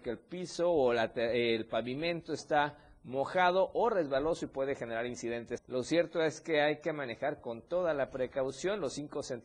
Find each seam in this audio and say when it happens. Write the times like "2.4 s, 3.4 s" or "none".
5.6 s